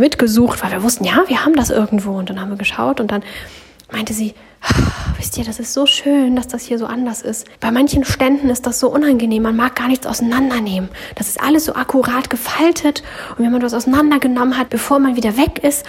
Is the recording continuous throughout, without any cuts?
no; 2 cuts; at 7.5 s, 14.7 s

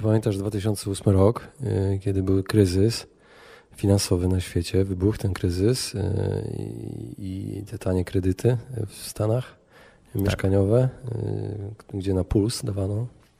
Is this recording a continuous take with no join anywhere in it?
yes; 0 cuts

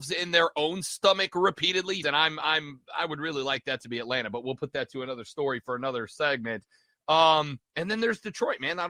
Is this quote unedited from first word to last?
no; 1 cut; at 2.0 s

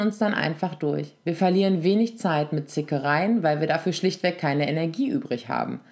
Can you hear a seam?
no; 0 cuts

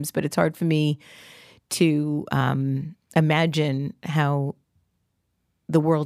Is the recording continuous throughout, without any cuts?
yes; 0 cuts

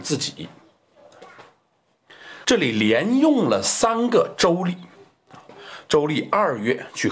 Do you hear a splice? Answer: yes; 1 cut; at 2.4 s

